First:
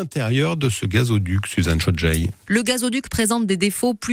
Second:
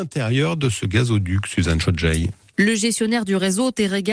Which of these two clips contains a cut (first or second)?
first